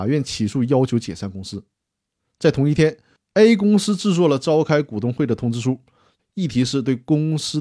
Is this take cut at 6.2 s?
yes; 1 cut; at 6.2 s

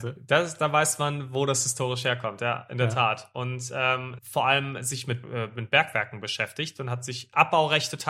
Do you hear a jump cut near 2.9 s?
no; 2 cuts; at 4.2 s, 5.2 s

